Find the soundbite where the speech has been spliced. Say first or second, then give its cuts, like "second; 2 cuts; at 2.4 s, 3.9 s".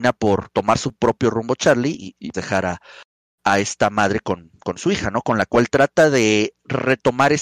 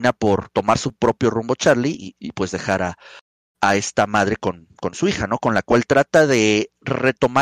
first; 1 cut; at 2.3 s